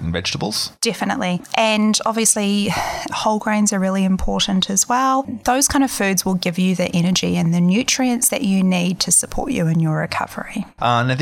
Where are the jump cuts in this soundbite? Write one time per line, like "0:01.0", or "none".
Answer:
0:03.1